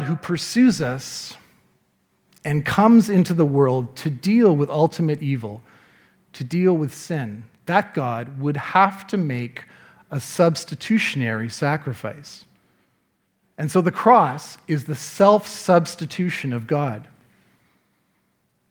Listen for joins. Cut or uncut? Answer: uncut